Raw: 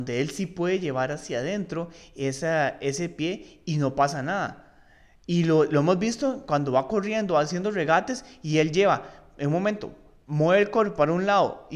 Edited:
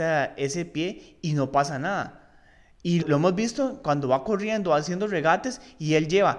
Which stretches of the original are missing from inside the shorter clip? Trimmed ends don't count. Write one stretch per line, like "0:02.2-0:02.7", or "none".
0:05.5-0:05.7